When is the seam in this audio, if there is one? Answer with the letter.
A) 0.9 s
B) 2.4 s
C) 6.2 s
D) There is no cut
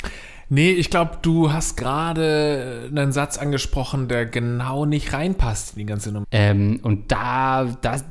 C